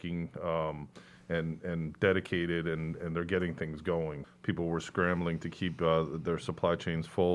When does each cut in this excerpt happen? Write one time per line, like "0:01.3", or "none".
0:04.2

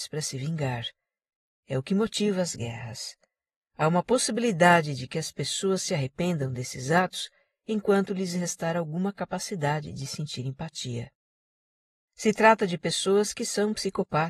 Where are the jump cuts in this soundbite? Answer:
0:12.1

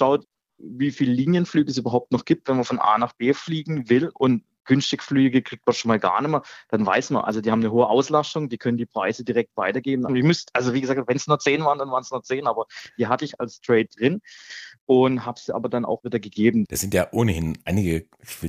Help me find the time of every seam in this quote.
0:10.1
0:16.7

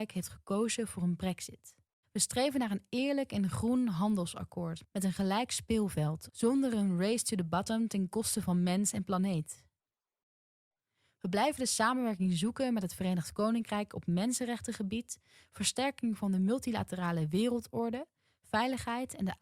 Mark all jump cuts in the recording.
0:02.0

